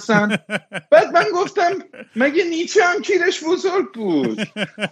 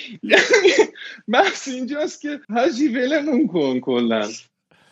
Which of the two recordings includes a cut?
second; 1 cut; at 2.4 s

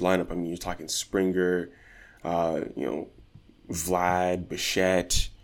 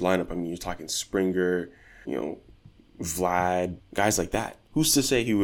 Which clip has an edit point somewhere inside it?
second; 2 cuts; at 2.0 s, 3.8 s

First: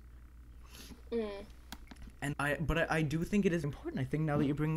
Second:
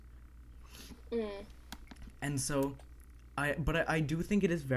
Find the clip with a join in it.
first; 2 cuts; at 2.3 s, 3.6 s

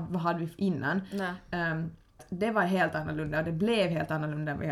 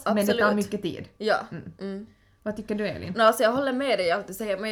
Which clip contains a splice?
first; 1 cut; at 2.2 s

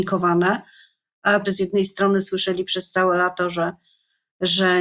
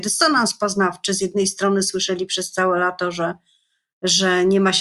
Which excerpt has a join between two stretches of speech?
first; 1 cut; at 1.5 s

